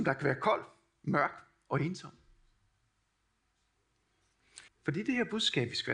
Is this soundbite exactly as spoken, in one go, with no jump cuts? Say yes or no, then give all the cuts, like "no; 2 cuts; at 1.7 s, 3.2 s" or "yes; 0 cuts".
no; 1 cut; at 4.7 s